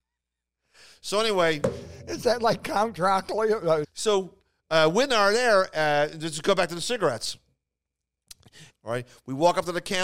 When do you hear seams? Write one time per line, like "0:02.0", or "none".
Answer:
0:03.8
0:08.7